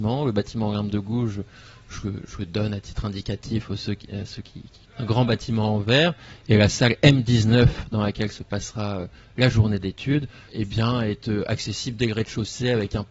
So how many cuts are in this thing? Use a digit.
2